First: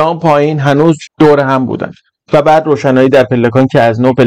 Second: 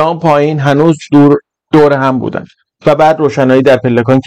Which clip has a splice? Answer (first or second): first